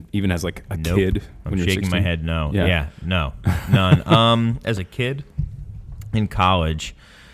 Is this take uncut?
yes; 0 cuts

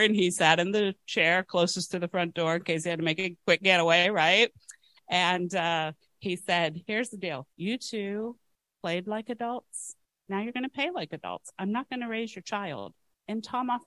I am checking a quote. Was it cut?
yes; 1 cut; at 7.5 s

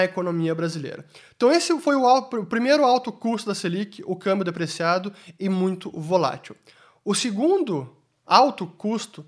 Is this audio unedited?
yes; 0 cuts

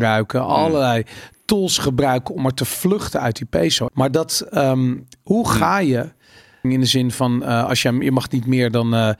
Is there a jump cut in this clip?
yes; 2 cuts; at 3.9 s, 6.6 s

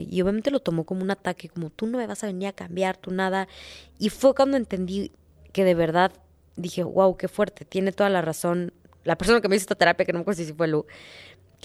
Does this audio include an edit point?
no; 0 cuts

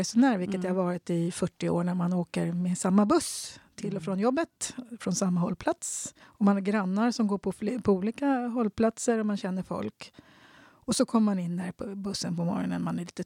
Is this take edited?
yes; 1 cut; at 6.2 s

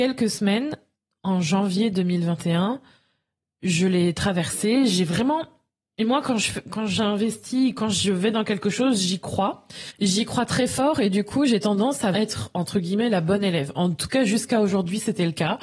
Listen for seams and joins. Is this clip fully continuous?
no; 1 cut; at 12.1 s

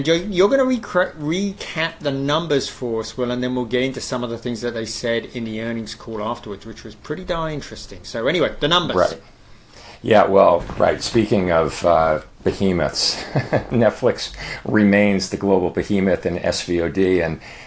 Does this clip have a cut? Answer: no; 0 cuts

